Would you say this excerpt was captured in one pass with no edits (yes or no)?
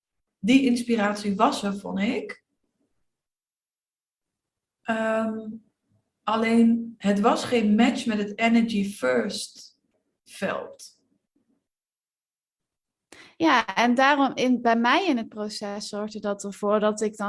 yes